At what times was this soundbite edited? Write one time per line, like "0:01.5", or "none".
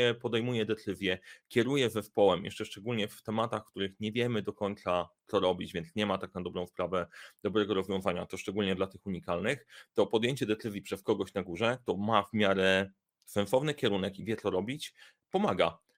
none